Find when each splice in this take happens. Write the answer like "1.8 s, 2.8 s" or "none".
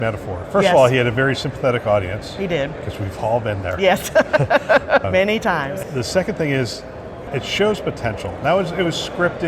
none